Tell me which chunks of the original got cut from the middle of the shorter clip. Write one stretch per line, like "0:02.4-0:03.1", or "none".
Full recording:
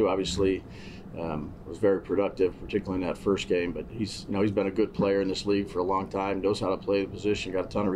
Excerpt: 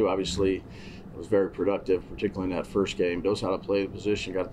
0:01.1-0:01.6
0:03.7-0:06.4